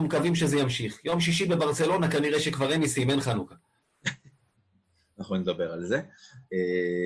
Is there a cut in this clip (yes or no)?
no